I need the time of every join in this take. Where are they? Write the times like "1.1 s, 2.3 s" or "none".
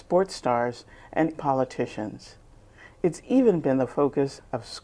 1.3 s

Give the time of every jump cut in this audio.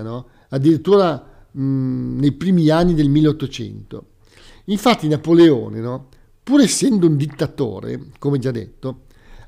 none

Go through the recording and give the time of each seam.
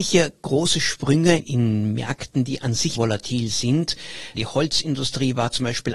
2.9 s, 4.3 s

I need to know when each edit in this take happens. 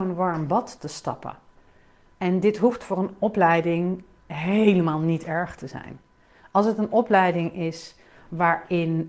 2.1 s

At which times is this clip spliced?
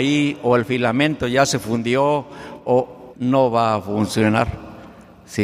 3.1 s

